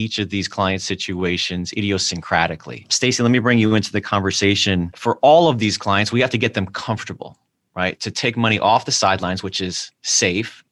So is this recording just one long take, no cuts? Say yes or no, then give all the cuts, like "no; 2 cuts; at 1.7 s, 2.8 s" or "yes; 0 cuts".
yes; 0 cuts